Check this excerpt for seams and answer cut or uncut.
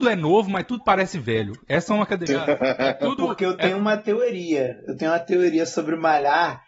cut